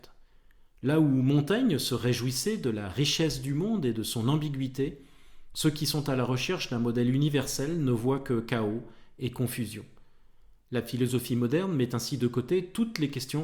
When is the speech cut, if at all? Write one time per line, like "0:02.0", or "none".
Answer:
none